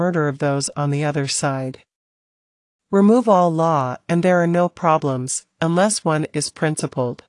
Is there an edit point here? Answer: no; 0 cuts

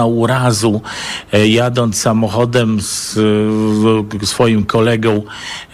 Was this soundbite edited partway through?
no; 0 cuts

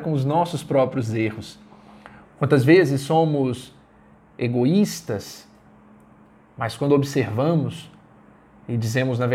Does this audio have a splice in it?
yes; 1 cut; at 2.2 s

